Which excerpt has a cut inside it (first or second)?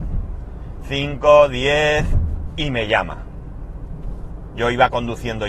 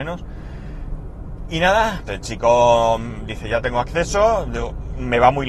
second